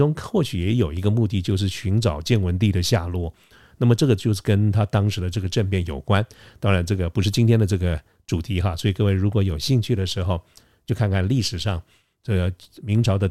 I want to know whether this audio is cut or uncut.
uncut